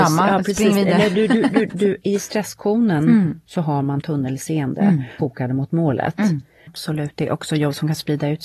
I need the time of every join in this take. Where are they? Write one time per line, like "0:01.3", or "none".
0:01.7
0:05.2
0:06.7